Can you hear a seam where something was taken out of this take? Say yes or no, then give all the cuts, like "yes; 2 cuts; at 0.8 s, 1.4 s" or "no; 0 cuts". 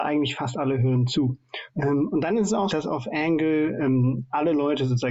yes; 2 cuts; at 1.7 s, 2.7 s